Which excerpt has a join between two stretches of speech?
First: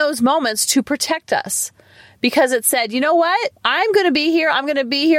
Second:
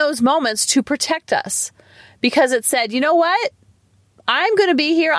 first; 1 cut; at 3.6 s

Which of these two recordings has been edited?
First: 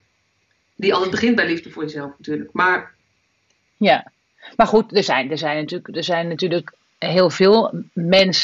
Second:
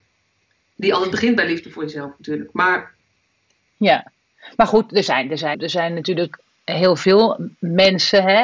second; 1 cut; at 5.5 s

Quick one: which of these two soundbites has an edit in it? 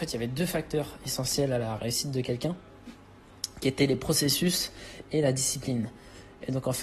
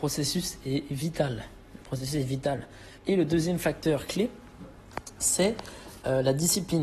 second; 1 cut; at 3.0 s

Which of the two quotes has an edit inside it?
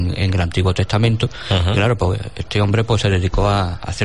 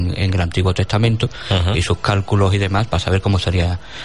second; 2 cuts; at 1.7 s, 2.9 s

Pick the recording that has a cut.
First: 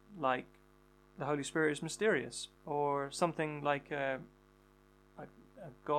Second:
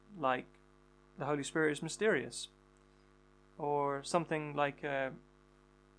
first; 1 cut; at 2.6 s

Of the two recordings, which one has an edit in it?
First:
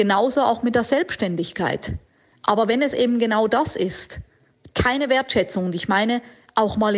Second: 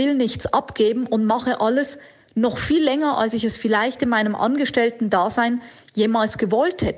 first; 2 cuts; at 2.3 s, 4.7 s

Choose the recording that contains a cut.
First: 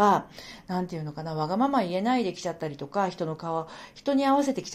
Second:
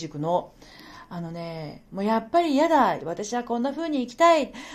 second; 1 cut; at 3.0 s

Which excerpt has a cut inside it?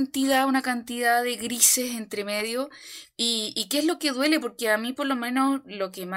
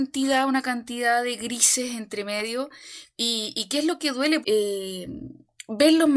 second; 1 cut; at 4.4 s

